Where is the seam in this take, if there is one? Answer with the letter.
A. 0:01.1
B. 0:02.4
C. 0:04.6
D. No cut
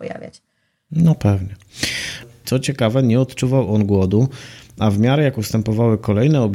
B